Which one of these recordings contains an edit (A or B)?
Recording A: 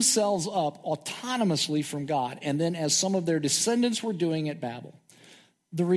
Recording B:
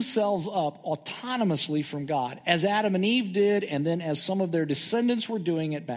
A